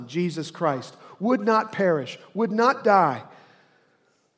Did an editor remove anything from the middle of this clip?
no; 0 cuts

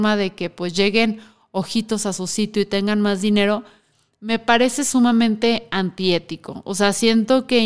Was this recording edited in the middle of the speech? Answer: no; 0 cuts

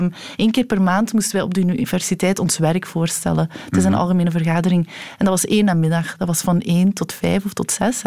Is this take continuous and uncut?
yes; 0 cuts

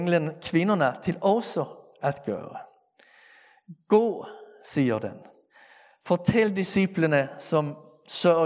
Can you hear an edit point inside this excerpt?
no; 0 cuts

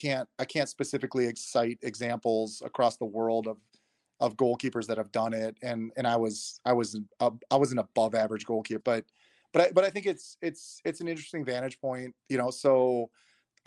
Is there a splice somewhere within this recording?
yes; 2 cuts; at 8.8 s, 12.2 s

